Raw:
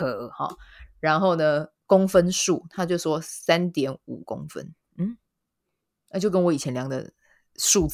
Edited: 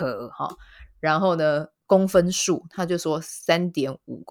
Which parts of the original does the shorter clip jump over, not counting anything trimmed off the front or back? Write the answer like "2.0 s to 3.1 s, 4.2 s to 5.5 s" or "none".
none